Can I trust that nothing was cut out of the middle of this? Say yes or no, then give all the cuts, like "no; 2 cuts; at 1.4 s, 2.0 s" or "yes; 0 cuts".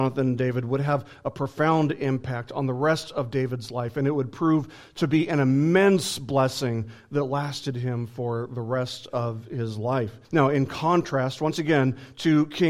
no; 1 cut; at 10.2 s